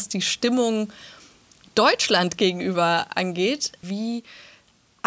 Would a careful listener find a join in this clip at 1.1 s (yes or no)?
no